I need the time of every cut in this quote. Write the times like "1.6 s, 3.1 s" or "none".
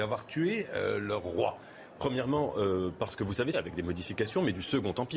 2.0 s, 3.5 s